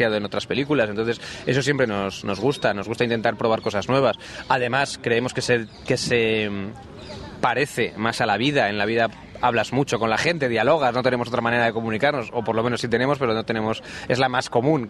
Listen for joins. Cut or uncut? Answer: uncut